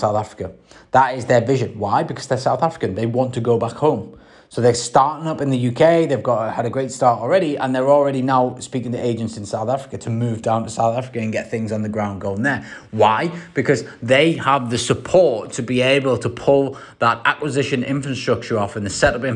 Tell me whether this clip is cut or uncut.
uncut